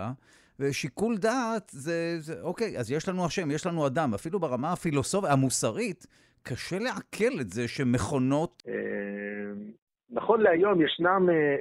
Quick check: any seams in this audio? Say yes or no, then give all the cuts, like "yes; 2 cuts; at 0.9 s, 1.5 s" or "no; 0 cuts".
yes; 1 cut; at 8.6 s